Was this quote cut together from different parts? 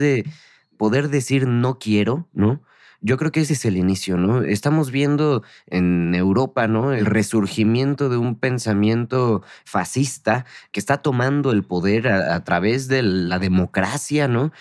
no; 0 cuts

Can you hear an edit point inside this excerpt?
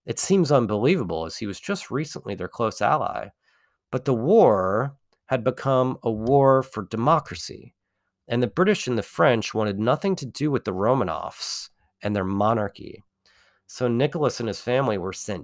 no; 0 cuts

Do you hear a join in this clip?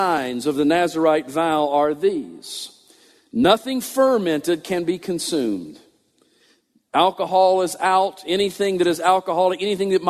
no; 0 cuts

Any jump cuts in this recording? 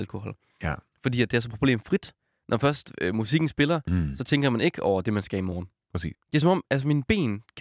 yes; 1 cut; at 6.1 s

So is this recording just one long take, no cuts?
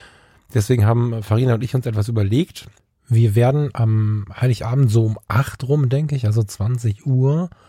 yes; 0 cuts

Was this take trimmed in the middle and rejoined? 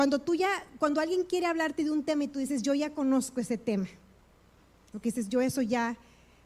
yes; 1 cut; at 4.9 s

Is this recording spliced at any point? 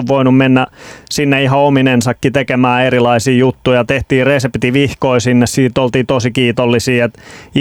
no; 0 cuts

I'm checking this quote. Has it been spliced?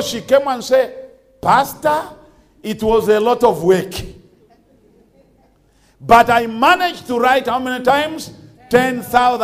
no; 0 cuts

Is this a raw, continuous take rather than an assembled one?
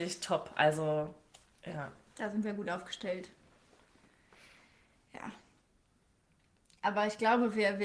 yes; 0 cuts

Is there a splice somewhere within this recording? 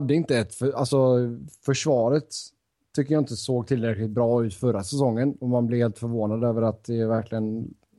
no; 0 cuts

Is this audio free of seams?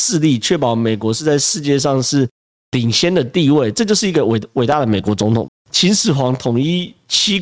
no; 1 cut; at 5.5 s

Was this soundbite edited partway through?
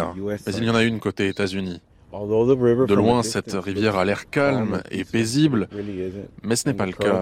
no; 0 cuts

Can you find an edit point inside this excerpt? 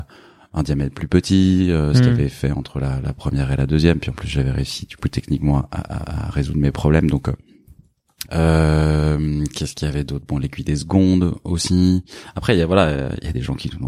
yes; 1 cut; at 8.3 s

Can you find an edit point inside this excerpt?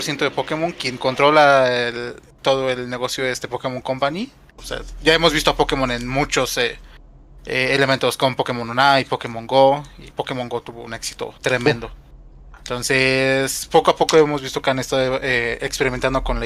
yes; 3 cuts; at 4.6 s, 10.1 s, 11.4 s

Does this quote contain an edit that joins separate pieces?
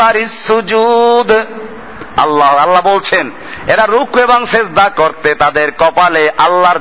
yes; 1 cut; at 4.9 s

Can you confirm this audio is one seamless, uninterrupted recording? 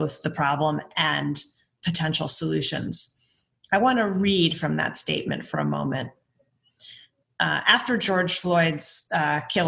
no; 1 cut; at 7.2 s

